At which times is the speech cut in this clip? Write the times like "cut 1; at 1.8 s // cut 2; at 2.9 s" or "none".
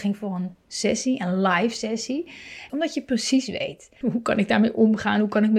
cut 1; at 2.7 s // cut 2; at 4.0 s